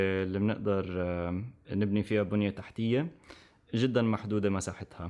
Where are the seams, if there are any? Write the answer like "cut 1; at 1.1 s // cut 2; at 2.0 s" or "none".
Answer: none